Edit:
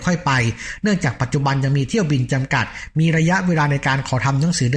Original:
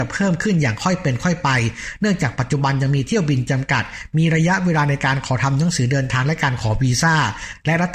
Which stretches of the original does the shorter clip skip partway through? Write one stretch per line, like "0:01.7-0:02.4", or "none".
none